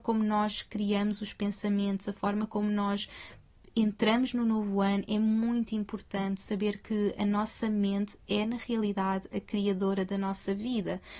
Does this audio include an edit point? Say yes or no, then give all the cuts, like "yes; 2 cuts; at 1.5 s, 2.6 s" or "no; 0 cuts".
no; 0 cuts